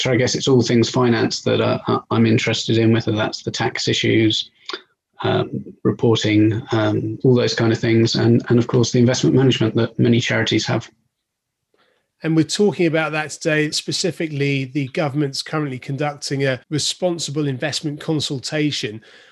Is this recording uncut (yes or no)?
no